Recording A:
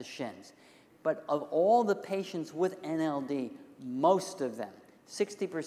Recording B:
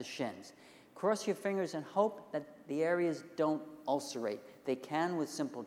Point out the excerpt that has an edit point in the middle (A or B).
A